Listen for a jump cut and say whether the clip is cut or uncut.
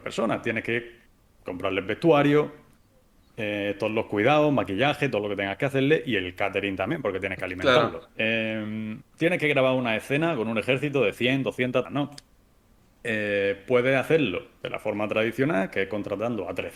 cut